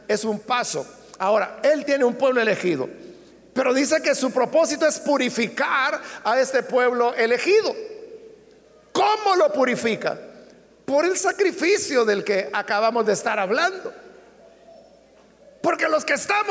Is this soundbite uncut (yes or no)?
no